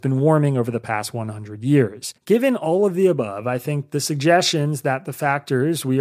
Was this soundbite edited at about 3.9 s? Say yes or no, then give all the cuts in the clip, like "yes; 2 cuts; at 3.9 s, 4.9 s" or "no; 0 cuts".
no; 1 cut; at 2.2 s